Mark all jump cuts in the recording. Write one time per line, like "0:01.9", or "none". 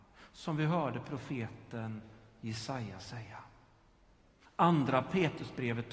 0:04.5